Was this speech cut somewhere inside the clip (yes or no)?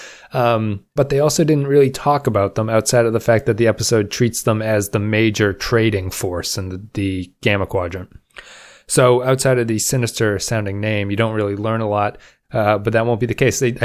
yes